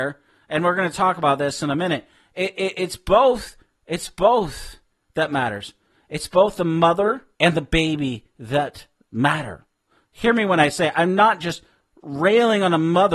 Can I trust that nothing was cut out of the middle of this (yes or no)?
no